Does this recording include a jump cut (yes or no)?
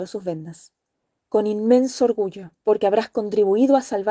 yes